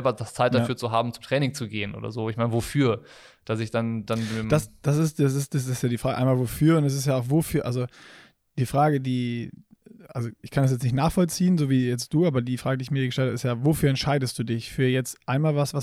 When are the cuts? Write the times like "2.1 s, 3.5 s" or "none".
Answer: none